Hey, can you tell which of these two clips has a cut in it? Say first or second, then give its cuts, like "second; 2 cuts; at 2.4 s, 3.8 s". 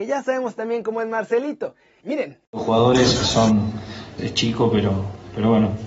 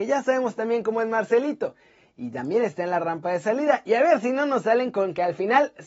first; 2 cuts; at 2.0 s, 4.2 s